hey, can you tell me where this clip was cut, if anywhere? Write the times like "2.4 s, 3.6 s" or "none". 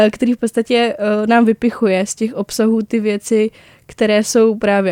none